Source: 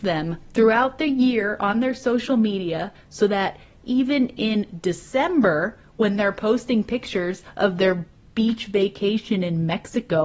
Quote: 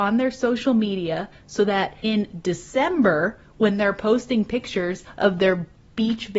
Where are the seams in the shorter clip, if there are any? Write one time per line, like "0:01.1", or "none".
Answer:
0:02.0